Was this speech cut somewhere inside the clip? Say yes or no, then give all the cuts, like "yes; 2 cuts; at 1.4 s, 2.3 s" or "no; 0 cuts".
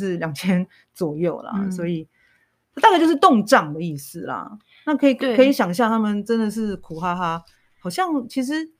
no; 0 cuts